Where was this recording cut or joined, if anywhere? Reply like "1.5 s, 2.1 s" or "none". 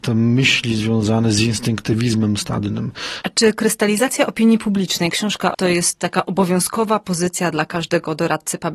3.2 s, 5.5 s